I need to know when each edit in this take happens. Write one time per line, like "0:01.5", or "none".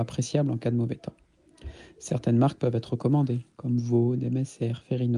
none